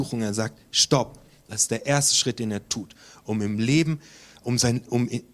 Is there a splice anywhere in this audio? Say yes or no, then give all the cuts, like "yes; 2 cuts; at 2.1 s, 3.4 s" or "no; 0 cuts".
no; 0 cuts